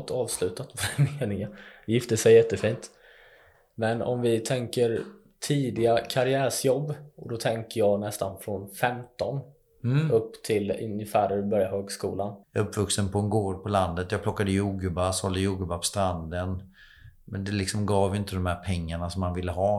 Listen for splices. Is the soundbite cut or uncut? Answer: cut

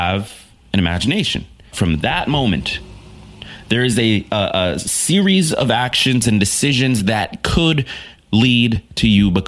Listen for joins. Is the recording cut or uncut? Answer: cut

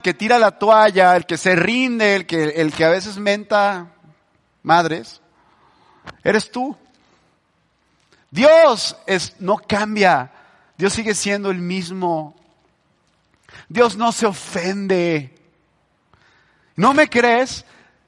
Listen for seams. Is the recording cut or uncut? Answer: uncut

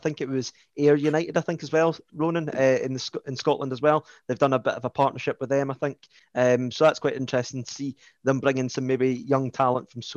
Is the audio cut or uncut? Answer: uncut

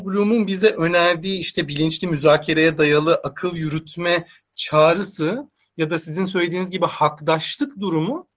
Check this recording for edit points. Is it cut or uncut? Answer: uncut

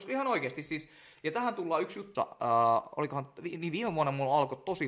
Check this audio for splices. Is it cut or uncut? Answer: cut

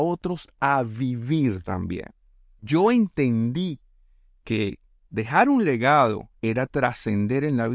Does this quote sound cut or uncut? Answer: cut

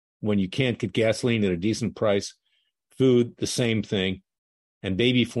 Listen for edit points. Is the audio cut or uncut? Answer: uncut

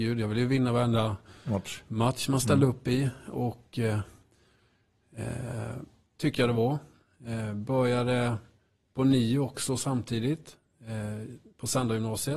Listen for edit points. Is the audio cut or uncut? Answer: cut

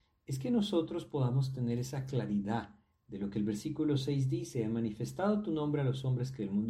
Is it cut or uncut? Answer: uncut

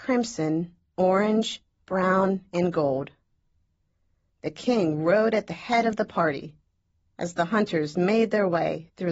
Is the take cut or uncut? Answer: uncut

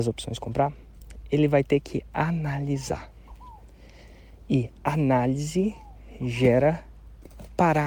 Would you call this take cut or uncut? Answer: uncut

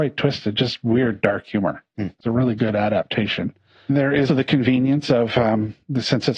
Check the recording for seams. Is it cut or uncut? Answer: cut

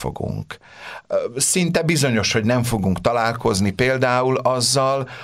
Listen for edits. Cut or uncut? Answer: uncut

